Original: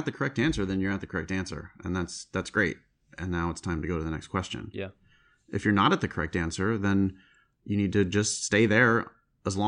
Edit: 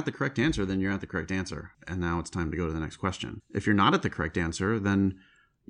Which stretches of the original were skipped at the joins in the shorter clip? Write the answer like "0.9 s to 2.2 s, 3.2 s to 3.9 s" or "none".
1.7 s to 3.1 s, 4.7 s to 5.4 s